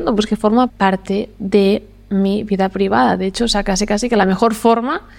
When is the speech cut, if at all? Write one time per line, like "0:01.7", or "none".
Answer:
none